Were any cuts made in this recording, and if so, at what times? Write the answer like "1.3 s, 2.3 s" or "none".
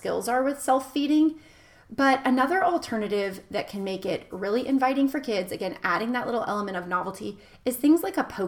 none